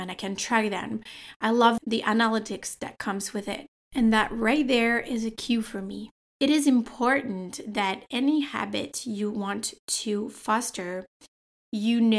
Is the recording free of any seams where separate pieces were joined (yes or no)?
yes